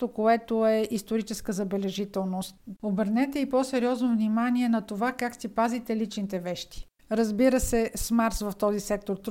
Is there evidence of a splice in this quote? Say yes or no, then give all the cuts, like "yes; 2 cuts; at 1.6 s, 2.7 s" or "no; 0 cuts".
yes; 2 cuts; at 2.8 s, 7.0 s